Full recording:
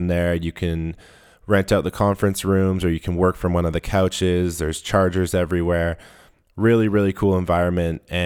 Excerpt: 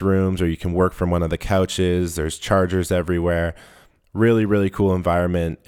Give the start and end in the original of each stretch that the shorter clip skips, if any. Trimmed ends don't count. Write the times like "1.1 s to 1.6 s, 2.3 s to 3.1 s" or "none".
none